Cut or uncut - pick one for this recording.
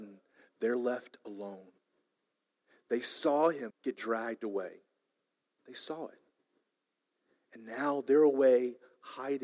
cut